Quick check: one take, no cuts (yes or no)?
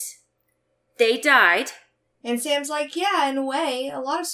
no